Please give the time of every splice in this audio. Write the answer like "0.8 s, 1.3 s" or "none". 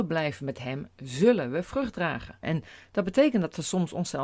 2.4 s